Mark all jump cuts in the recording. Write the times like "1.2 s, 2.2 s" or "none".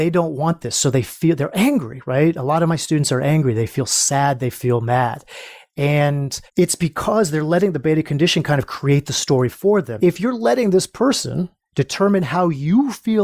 6.5 s, 10.0 s